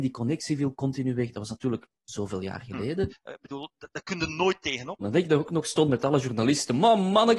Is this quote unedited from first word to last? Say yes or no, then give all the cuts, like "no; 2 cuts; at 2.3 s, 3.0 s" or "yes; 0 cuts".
no; 2 cuts; at 3.1 s, 5.0 s